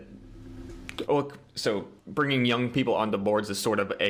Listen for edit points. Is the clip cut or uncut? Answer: cut